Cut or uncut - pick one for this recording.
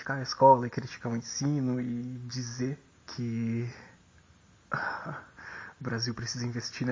uncut